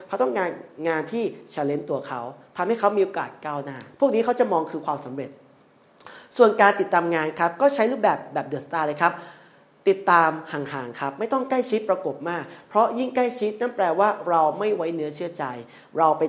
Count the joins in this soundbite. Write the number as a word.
one